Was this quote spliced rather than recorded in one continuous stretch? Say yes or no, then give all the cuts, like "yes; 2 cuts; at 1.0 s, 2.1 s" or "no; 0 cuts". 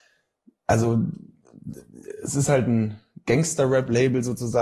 no; 0 cuts